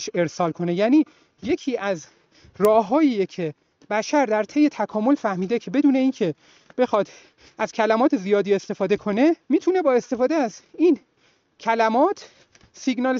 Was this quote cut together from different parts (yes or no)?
yes